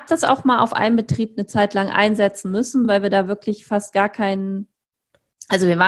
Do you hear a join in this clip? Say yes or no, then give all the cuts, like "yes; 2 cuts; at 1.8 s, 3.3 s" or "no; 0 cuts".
no; 0 cuts